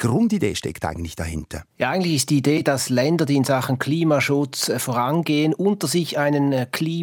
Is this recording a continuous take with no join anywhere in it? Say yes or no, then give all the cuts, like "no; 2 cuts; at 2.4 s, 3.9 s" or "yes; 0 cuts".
no; 1 cut; at 1.7 s